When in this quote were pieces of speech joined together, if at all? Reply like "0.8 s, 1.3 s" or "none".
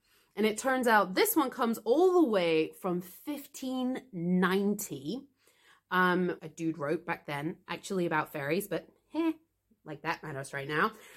6.4 s